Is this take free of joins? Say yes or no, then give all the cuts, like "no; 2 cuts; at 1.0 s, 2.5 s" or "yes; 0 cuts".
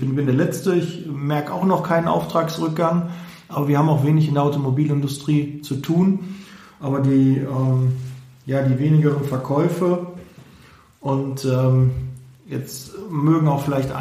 yes; 0 cuts